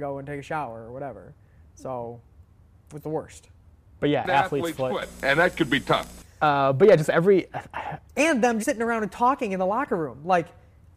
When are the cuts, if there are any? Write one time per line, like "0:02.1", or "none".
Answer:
0:06.2
0:08.6